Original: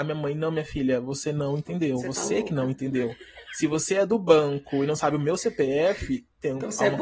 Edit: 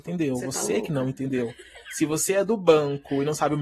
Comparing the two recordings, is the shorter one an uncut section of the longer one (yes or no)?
yes